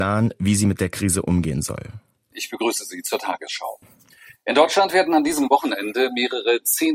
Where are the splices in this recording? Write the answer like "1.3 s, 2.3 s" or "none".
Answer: 2.3 s